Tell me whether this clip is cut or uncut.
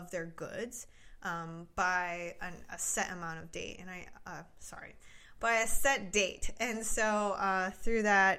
uncut